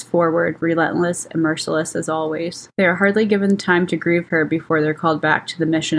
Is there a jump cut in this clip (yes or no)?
yes